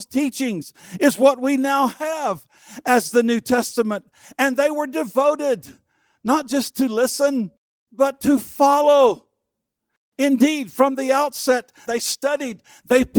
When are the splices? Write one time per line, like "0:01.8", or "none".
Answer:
0:11.8

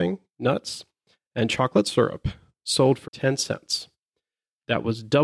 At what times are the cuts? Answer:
0:03.0

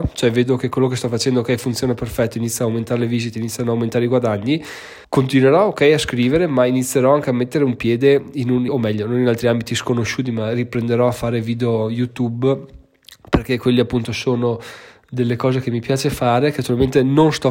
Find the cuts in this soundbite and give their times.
0:05.0
0:08.7

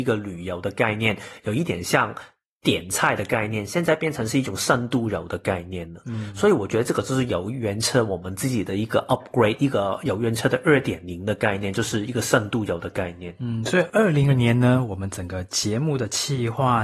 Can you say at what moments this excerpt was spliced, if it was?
0:14.3

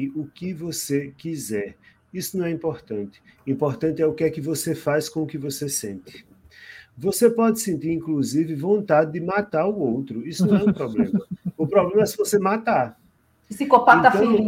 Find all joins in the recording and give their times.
none

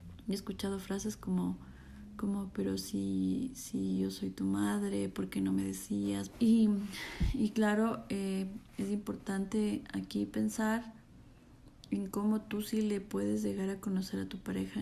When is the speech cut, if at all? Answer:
0:06.3

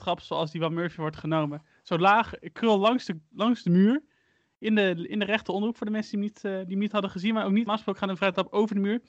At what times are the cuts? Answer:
0:07.7

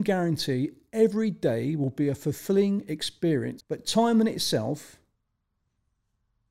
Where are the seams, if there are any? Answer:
0:03.6

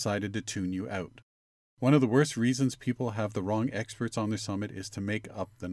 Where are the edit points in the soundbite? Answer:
none

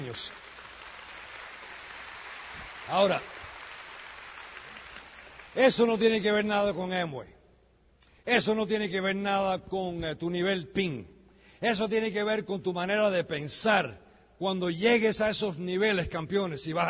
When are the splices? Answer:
none

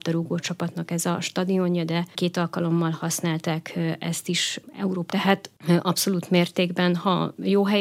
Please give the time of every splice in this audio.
0:05.1

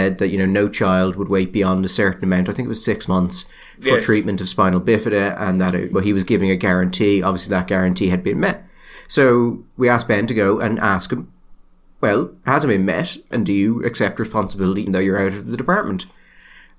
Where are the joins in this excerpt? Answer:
0:05.9
0:13.3
0:14.9

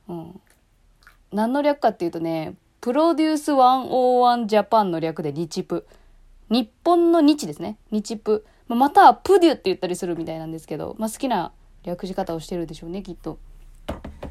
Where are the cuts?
none

